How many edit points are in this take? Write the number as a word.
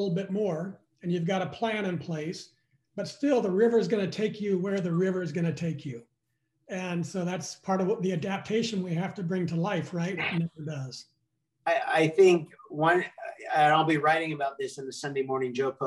one